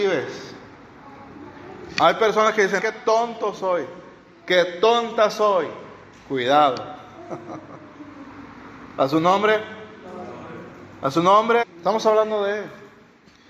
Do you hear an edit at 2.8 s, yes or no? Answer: yes